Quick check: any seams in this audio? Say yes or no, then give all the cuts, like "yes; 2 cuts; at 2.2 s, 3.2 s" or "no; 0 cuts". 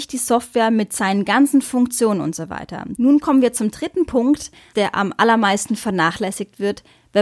yes; 2 cuts; at 3.0 s, 4.7 s